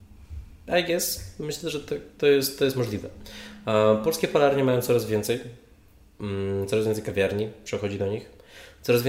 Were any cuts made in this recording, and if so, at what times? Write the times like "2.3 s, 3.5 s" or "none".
none